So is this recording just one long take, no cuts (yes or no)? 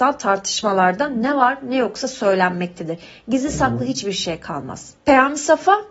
no